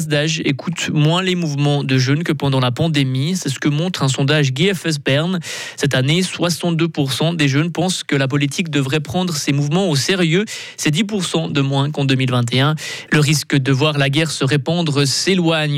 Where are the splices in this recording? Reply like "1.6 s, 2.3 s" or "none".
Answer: 13.1 s